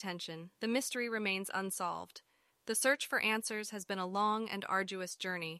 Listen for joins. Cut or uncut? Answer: cut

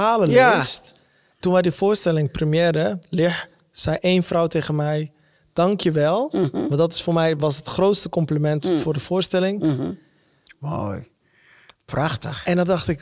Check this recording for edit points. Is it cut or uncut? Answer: cut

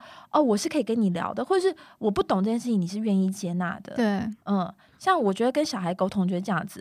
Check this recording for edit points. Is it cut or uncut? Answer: uncut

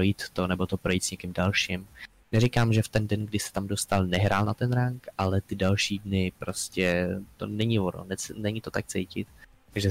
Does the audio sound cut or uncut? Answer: cut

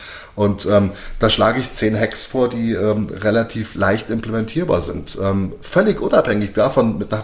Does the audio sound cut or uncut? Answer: uncut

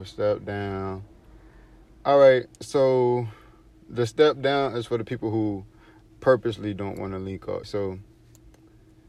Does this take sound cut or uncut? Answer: cut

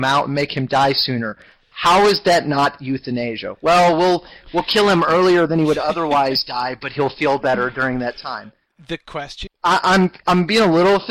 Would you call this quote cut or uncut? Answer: cut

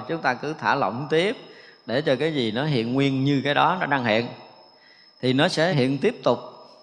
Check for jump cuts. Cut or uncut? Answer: cut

